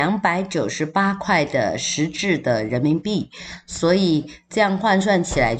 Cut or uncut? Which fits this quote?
uncut